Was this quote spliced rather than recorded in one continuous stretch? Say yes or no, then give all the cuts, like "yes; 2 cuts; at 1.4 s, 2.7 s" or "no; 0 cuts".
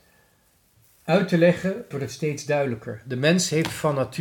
yes; 1 cut; at 1.9 s